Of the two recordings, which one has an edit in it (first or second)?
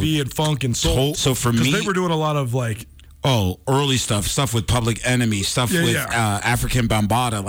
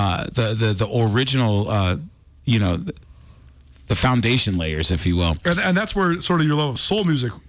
first